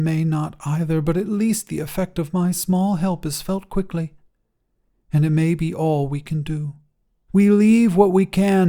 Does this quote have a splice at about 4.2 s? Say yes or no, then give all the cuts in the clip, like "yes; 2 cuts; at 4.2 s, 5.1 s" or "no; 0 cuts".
no; 1 cut; at 7.3 s